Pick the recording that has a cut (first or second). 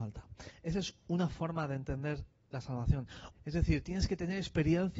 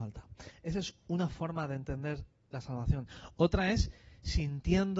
first